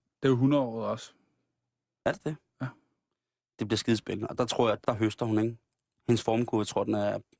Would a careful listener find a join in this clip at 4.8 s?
yes; 1 cut; at 4.8 s

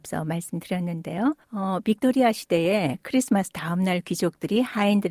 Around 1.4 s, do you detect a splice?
yes; 1 cut; at 1.4 s

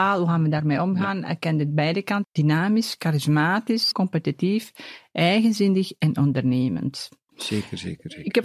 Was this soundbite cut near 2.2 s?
yes; 3 cuts; at 2.2 s, 3.9 s, 7.3 s

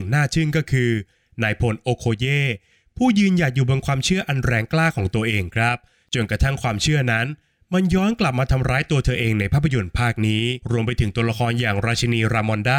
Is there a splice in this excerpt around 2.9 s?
no; 1 cut; at 10.6 s

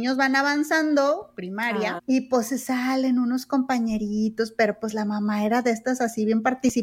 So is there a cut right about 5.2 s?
no; 1 cut; at 2.0 s

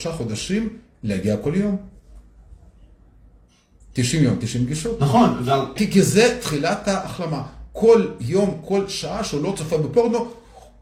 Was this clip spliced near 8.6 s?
no; 1 cut; at 5.8 s

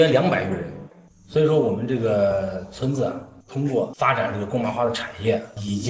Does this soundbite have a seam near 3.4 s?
no; 0 cuts

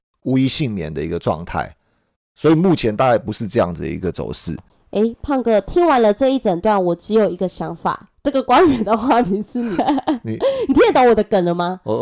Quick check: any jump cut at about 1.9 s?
no; 2 cuts; at 8.1 s, 9.8 s

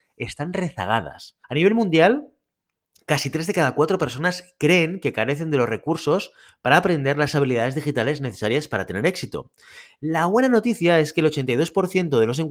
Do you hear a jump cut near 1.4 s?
yes; 1 cut; at 1.4 s

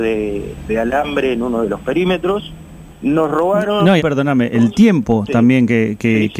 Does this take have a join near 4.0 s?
yes; 2 cuts; at 2.9 s, 4.0 s

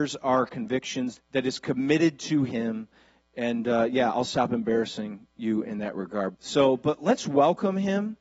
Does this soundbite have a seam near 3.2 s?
no; 2 cuts; at 1.2 s, 6.3 s

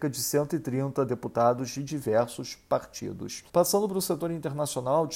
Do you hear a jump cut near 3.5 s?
yes; 1 cut; at 3.5 s

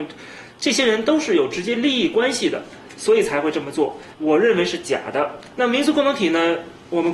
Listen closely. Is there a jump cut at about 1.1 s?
no; 2 cuts; at 4.1 s, 5.5 s

